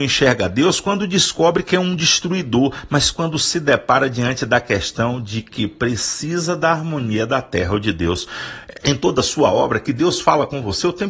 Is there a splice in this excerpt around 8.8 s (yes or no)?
yes